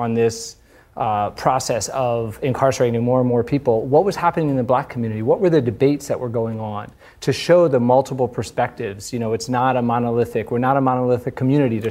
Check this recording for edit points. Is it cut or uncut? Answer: uncut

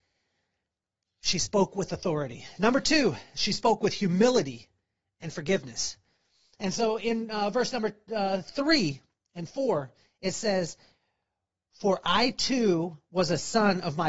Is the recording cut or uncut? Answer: uncut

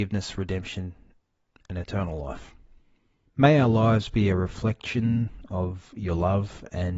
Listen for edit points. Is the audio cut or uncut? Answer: cut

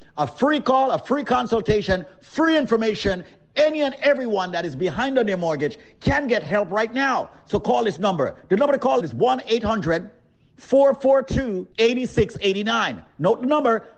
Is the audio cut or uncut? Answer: cut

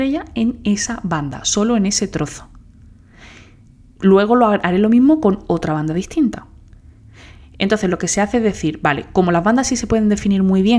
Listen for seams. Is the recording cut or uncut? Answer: uncut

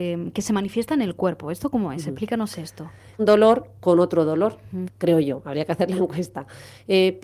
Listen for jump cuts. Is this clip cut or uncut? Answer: cut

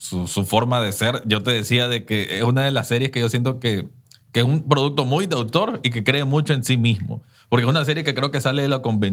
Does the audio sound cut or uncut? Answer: uncut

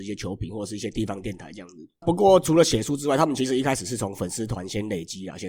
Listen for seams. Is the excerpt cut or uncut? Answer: cut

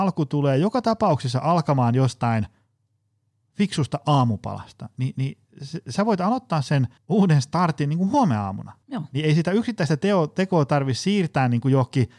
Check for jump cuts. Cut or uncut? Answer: cut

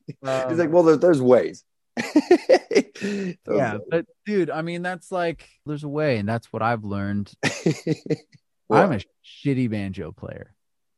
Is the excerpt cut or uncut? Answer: cut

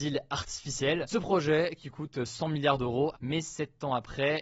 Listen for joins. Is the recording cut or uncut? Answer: cut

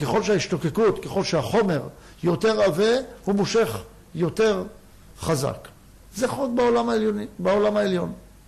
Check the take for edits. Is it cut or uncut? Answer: uncut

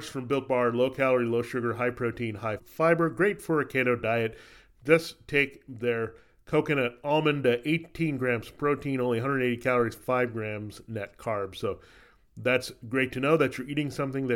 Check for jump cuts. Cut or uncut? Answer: cut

